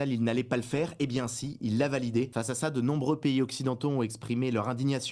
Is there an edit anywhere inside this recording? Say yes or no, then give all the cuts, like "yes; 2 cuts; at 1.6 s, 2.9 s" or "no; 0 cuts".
no; 0 cuts